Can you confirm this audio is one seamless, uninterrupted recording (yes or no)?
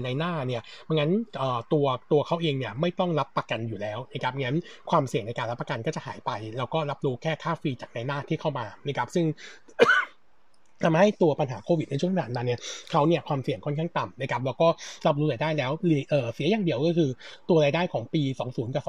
yes